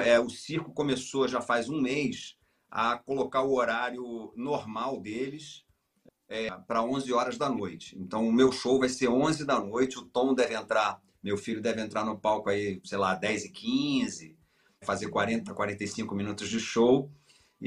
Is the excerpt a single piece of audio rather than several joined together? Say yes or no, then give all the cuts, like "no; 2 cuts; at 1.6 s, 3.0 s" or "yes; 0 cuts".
no; 1 cut; at 14.8 s